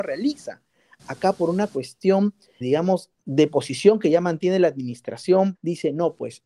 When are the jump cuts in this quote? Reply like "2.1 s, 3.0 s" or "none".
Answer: 2.6 s, 5.6 s